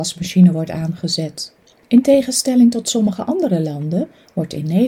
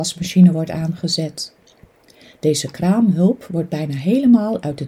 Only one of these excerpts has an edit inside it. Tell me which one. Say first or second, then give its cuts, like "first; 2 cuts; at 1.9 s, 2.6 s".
first; 1 cut; at 1.8 s